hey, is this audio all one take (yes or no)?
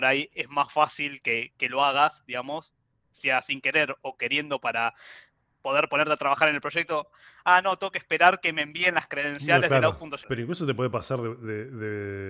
no